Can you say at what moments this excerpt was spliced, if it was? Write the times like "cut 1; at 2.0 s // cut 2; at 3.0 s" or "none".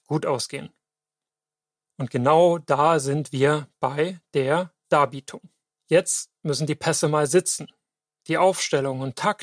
none